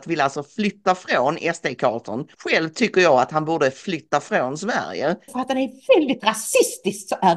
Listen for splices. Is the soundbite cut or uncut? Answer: cut